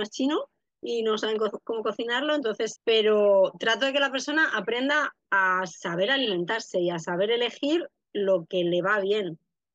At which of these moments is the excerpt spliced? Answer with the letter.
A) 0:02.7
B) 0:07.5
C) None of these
A